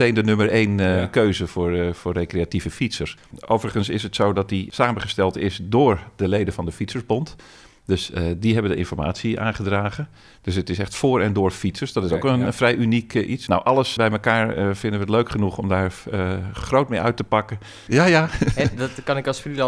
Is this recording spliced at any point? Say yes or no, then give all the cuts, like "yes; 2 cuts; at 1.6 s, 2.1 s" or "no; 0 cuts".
yes; 2 cuts; at 14.0 s, 17.9 s